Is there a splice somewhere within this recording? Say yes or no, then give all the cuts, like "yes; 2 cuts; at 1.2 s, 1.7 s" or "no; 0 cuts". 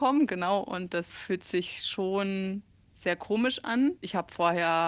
yes; 1 cut; at 4.0 s